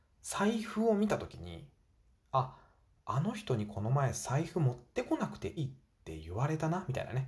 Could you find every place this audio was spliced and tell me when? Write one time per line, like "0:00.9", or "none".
0:05.6